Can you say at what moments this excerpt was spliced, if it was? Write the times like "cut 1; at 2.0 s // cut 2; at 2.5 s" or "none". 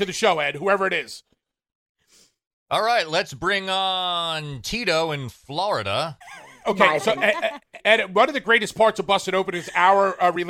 cut 1; at 6.2 s // cut 2; at 7.8 s